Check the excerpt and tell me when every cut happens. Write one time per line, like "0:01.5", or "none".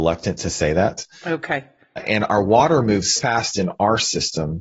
0:02.0
0:03.2